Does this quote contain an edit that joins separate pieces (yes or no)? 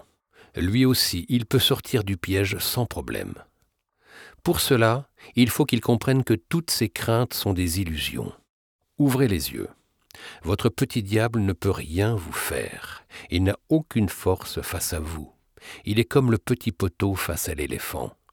no